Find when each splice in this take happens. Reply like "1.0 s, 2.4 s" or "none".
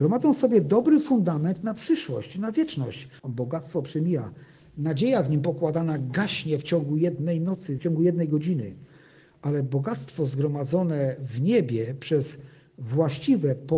3.2 s, 7.8 s